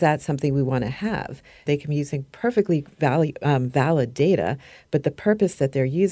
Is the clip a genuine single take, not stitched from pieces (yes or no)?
no